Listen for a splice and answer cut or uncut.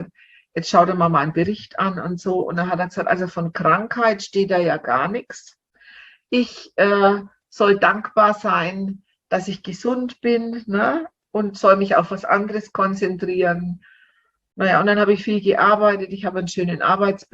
uncut